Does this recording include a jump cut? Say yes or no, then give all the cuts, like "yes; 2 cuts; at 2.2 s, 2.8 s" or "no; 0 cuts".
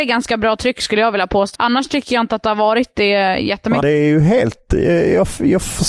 yes; 2 cuts; at 1.5 s, 3.8 s